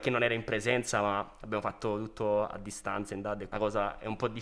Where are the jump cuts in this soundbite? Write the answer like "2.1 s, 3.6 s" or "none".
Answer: 3.5 s